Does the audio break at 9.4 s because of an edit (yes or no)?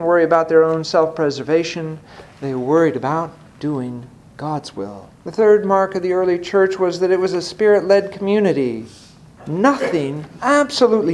yes